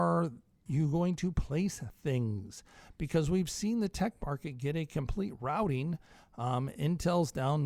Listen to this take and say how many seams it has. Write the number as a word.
zero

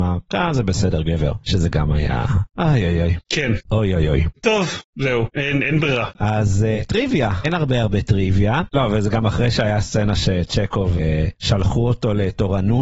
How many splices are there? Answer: two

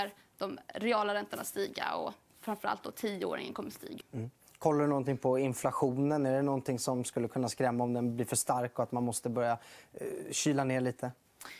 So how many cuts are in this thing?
one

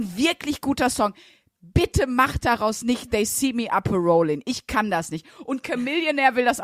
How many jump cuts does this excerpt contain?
zero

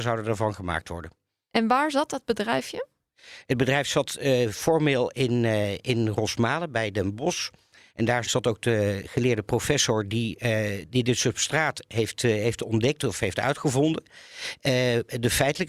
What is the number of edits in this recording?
one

